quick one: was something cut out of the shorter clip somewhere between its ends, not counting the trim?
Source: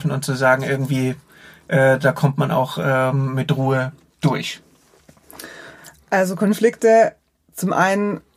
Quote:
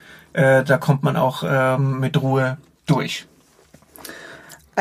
no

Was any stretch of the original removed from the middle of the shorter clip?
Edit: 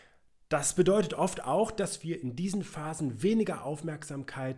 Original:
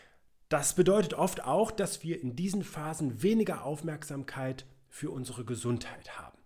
no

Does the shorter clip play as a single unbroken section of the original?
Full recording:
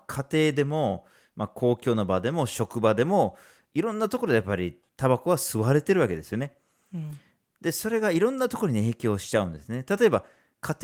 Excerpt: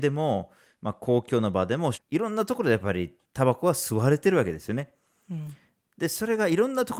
no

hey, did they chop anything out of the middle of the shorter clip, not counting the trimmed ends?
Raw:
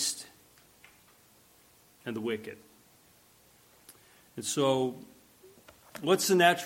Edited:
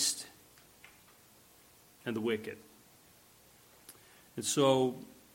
no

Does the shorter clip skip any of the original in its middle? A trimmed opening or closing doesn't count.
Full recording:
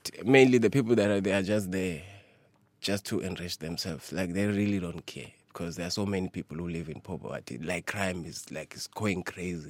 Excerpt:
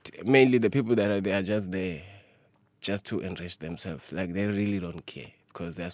no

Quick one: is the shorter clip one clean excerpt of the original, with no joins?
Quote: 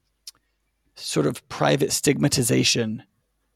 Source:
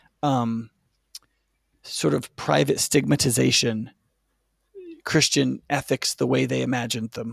yes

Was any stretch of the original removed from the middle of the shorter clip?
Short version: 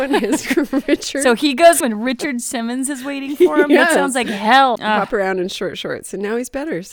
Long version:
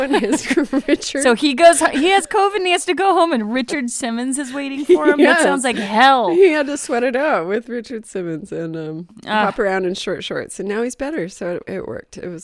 yes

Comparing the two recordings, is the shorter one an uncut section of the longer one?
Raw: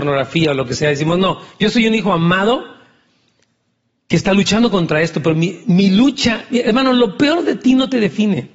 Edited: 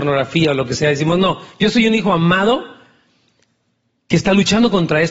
yes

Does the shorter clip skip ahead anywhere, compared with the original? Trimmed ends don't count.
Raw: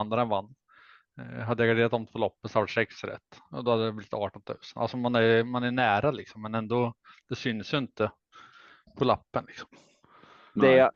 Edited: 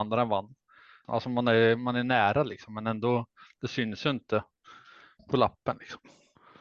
yes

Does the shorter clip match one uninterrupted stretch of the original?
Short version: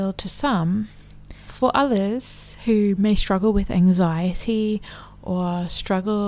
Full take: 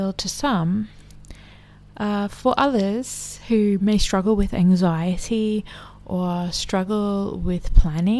no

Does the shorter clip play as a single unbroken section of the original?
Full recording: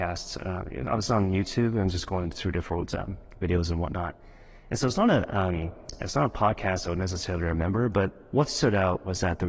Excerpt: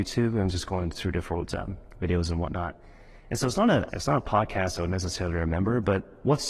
no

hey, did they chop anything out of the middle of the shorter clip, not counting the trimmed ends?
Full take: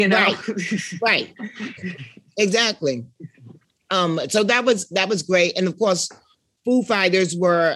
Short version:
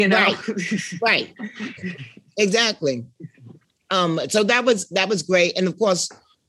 no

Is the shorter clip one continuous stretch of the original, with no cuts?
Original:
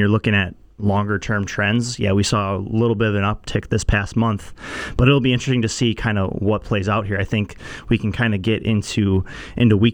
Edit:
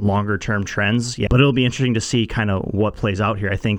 no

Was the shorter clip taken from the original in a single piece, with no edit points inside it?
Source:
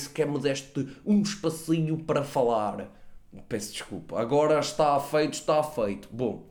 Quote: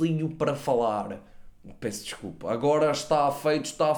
yes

